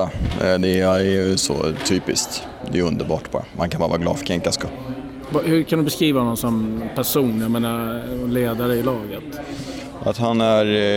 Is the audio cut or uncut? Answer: uncut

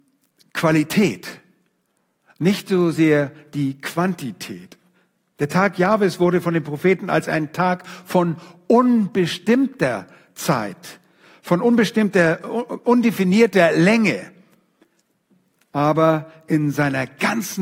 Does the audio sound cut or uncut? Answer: uncut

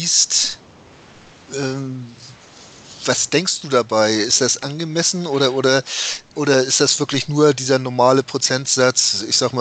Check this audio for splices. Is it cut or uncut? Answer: uncut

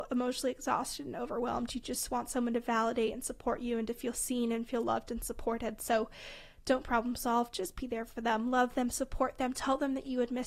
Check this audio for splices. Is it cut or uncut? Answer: uncut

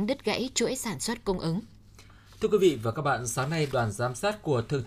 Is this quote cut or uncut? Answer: uncut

